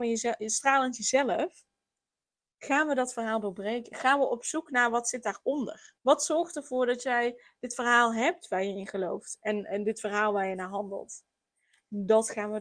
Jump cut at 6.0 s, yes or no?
yes